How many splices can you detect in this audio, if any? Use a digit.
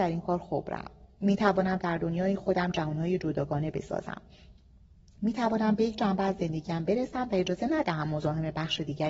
0